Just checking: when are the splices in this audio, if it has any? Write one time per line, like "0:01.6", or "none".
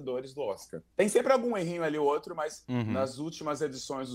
0:00.9